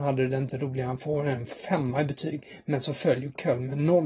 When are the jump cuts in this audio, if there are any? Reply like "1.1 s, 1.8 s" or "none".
none